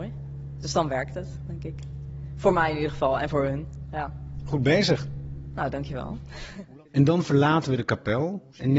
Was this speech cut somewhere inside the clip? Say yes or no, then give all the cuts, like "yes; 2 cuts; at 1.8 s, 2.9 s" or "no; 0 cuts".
yes; 1 cut; at 6.9 s